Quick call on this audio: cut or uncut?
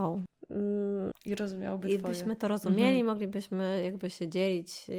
cut